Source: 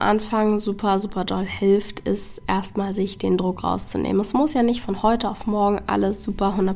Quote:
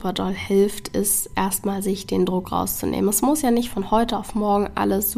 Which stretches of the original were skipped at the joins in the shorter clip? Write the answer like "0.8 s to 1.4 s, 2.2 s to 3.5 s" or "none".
none